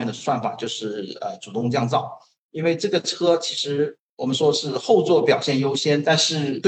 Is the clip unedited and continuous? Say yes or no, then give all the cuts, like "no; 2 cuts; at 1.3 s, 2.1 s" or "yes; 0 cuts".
yes; 0 cuts